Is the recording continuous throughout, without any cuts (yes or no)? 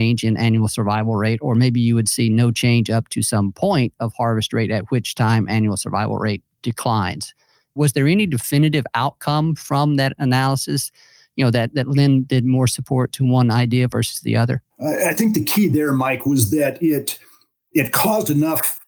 yes